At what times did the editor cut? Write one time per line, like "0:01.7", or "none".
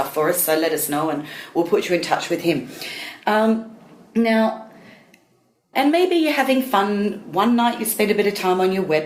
0:05.7

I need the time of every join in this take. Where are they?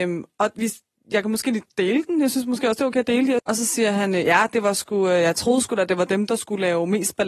0:03.4

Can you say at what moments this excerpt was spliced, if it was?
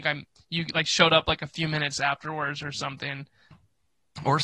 0:03.5

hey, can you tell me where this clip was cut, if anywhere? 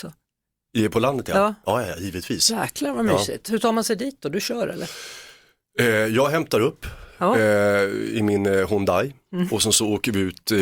none

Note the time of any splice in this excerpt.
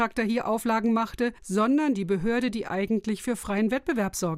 0:01.4

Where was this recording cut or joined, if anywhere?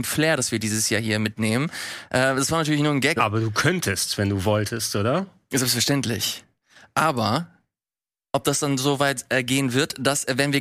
0:03.2

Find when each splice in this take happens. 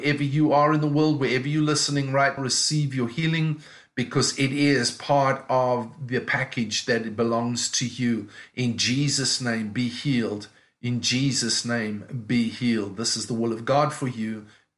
0:02.4

